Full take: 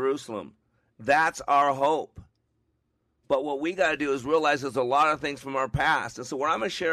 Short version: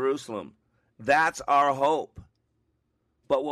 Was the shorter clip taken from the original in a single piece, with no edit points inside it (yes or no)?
yes